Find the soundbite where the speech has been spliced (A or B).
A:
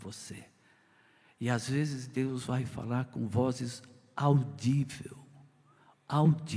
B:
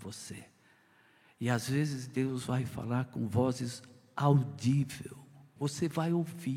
B